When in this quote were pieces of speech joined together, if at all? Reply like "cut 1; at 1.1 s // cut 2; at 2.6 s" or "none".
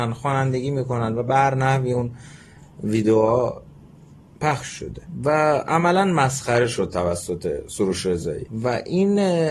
none